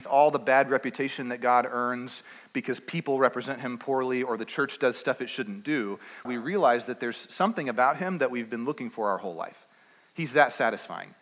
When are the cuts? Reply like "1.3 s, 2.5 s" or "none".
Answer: 6.2 s

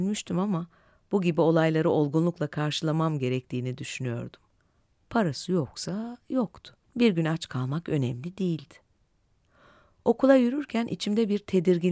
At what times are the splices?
6.8 s

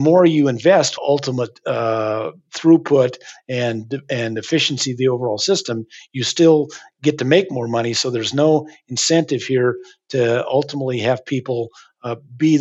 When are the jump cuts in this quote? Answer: 1.0 s

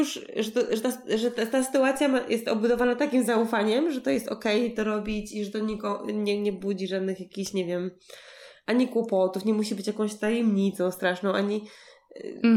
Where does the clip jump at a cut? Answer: none

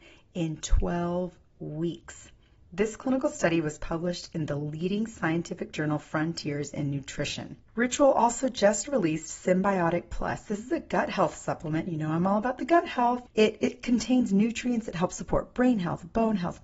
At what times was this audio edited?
13.3 s

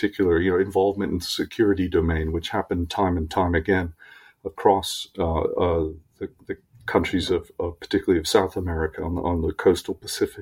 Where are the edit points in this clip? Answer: none

